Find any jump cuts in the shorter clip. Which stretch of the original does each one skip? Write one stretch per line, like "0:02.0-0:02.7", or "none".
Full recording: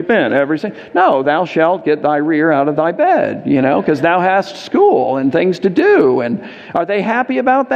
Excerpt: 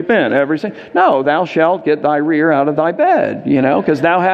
none

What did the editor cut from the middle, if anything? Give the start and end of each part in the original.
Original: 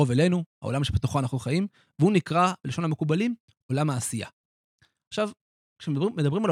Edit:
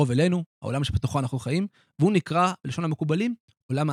none

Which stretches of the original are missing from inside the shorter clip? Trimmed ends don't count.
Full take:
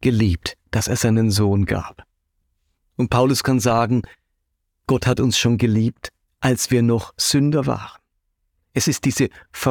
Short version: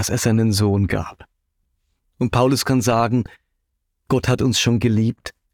none

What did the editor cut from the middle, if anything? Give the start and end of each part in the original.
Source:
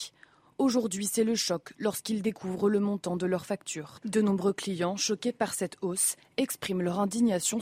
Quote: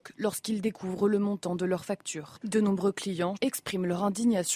0:05.0-0:06.3

